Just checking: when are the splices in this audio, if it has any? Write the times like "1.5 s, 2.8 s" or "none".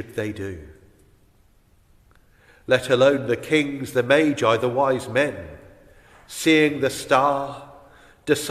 none